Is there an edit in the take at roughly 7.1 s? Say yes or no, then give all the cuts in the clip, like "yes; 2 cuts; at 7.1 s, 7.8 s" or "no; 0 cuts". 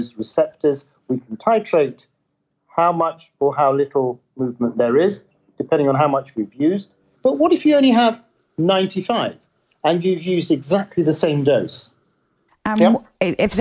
yes; 2 cuts; at 7.1 s, 12.5 s